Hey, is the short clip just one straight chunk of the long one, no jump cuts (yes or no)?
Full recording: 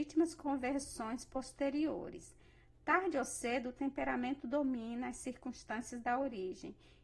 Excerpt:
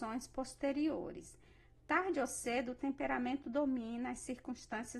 yes